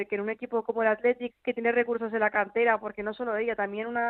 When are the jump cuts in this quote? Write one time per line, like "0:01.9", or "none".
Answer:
0:01.3